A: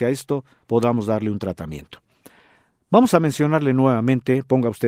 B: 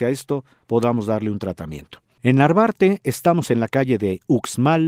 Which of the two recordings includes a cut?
B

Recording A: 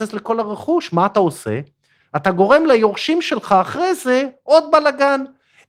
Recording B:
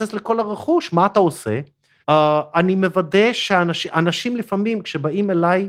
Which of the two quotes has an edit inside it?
B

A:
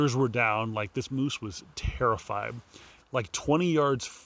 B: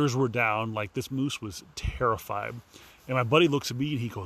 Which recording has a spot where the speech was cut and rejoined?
A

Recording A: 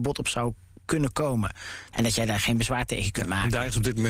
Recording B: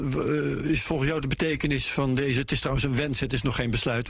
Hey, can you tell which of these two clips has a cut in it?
A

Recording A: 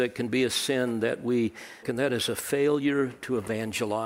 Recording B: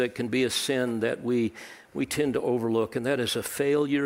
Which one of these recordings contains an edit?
A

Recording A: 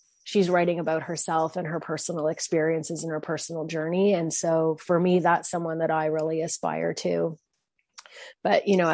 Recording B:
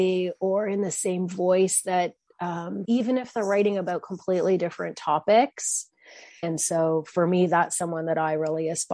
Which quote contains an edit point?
B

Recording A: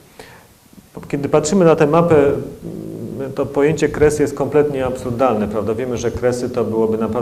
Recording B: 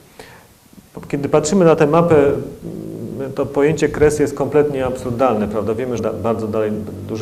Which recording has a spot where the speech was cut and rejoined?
B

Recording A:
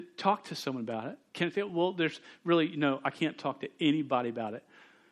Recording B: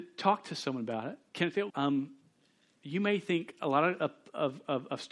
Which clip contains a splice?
B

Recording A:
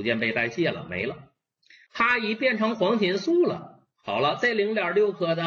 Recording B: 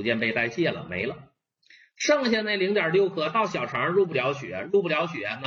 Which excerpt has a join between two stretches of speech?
A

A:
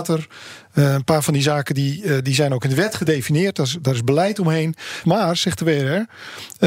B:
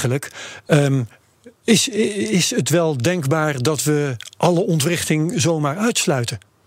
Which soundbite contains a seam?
A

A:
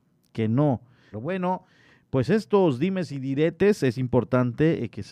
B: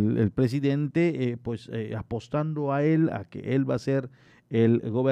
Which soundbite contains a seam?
A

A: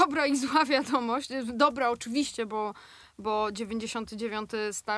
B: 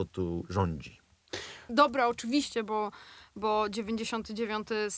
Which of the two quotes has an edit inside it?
B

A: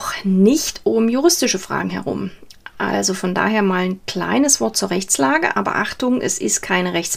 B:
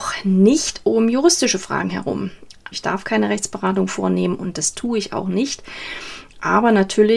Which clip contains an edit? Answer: B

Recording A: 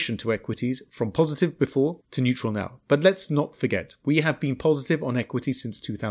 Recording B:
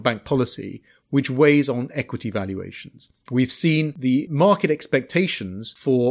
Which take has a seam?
B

